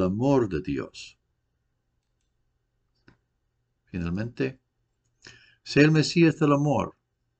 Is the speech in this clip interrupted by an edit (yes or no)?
no